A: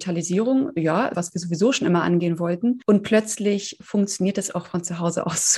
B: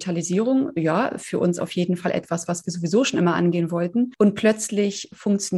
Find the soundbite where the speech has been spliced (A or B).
A